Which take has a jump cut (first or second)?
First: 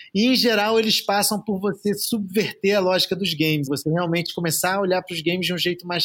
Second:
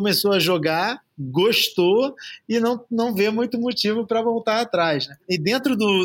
first